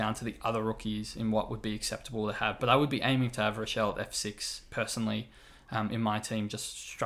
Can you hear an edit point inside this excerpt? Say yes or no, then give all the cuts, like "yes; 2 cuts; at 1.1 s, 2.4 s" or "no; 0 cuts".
no; 0 cuts